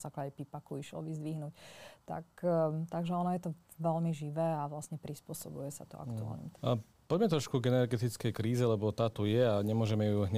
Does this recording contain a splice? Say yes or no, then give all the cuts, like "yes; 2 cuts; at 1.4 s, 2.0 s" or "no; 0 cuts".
yes; 1 cut; at 6.5 s